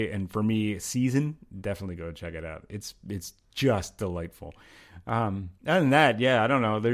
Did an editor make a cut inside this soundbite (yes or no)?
yes